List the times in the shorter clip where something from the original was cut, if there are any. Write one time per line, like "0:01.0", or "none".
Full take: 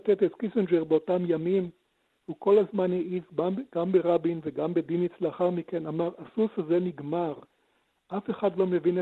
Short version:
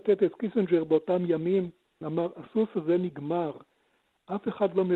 0:02.0